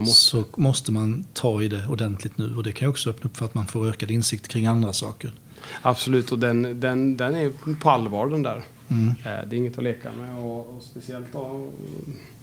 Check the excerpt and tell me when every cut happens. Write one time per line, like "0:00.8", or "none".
none